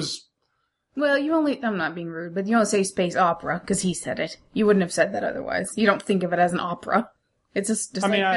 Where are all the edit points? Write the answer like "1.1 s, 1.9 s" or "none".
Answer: none

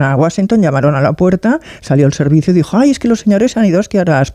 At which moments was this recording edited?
none

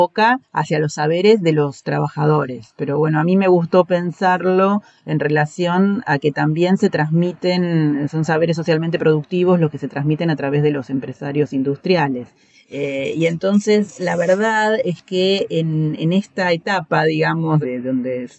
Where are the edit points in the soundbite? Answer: none

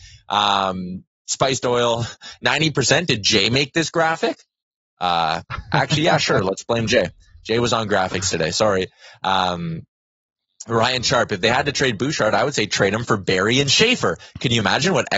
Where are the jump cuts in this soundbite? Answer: none

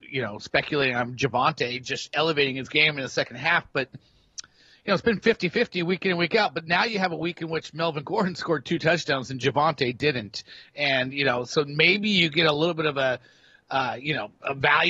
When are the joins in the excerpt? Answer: 3.9 s

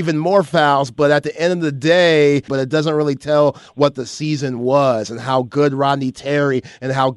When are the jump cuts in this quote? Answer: 2.5 s

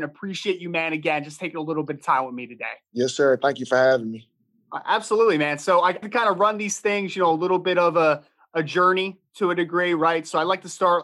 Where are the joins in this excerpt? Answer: 6.0 s

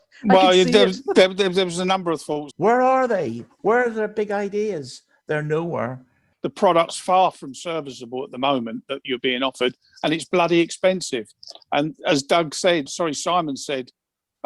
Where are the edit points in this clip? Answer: 2.5 s, 6.3 s, 12.9 s

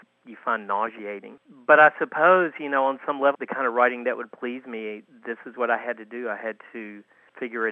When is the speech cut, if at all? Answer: 3.3 s

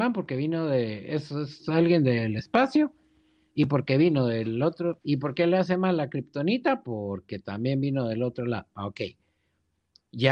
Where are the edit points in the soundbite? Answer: 5.0 s

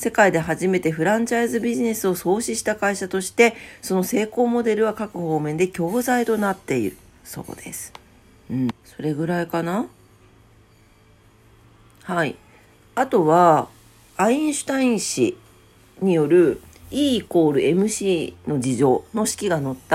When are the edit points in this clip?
8.7 s

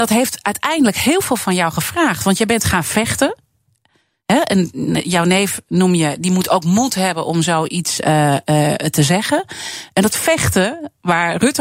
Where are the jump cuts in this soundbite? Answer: none

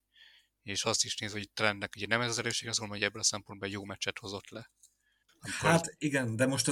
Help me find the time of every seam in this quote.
5.3 s

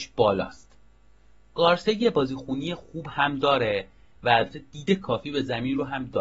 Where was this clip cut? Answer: none

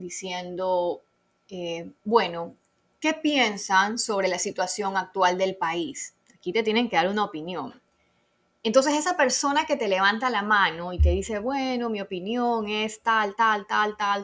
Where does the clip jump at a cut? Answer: none

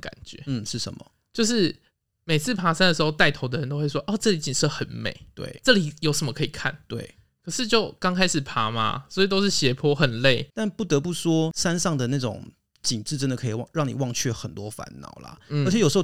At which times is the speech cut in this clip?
10.5 s

